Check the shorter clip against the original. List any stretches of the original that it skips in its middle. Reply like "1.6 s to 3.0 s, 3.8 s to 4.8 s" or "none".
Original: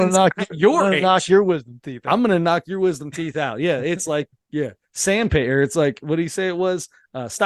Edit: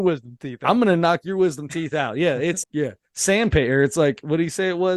4.1 s to 4.4 s